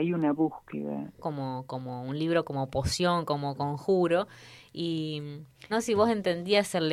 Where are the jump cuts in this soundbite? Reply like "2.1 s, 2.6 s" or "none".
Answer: 1.2 s, 5.7 s

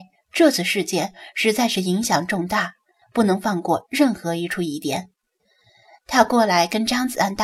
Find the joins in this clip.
3.0 s

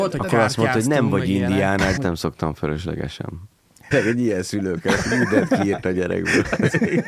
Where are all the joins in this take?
2.0 s, 3.9 s

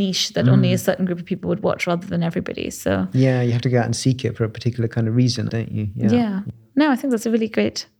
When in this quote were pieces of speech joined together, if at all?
5.5 s

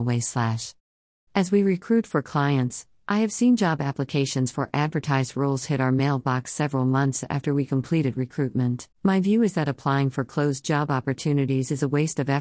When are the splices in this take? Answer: 1.3 s, 8.9 s

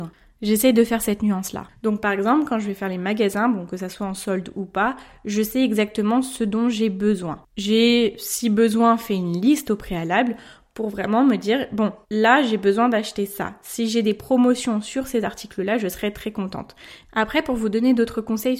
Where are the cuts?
12.0 s, 17.0 s

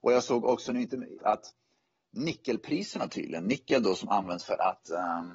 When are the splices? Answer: 1.2 s

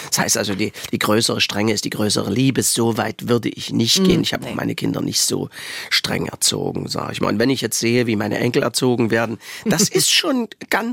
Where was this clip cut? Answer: none

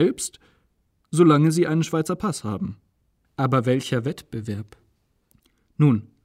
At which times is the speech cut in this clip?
3.2 s

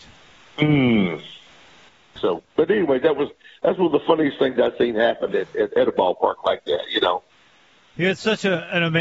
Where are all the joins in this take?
2.2 s

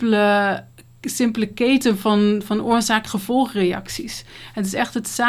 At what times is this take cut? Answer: none

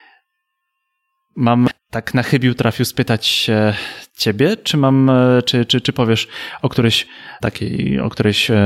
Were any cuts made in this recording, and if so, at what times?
7.4 s

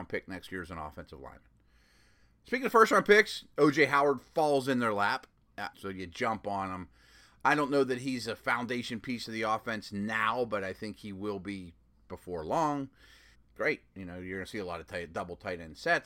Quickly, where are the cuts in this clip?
5.7 s, 13.3 s

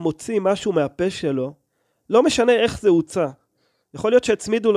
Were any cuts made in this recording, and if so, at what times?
none

